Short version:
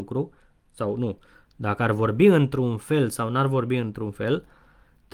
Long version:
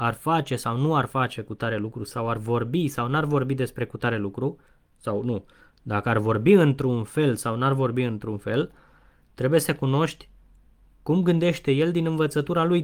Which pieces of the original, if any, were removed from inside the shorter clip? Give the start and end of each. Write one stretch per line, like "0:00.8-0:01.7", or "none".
none